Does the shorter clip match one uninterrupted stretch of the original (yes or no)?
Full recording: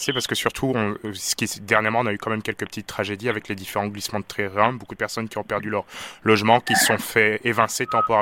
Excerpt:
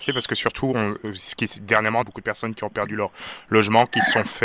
no